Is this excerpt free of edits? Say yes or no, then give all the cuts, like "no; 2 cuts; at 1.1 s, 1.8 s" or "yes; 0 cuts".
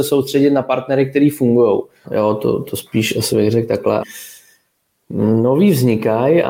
no; 2 cuts; at 2.0 s, 4.0 s